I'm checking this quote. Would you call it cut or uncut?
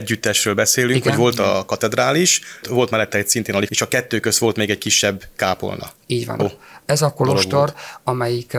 cut